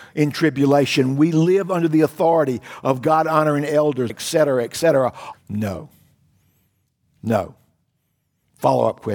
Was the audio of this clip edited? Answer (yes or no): yes